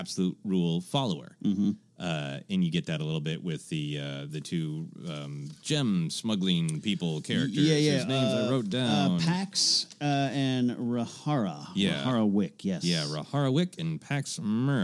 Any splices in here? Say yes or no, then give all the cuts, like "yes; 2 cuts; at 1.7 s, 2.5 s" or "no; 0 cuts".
no; 0 cuts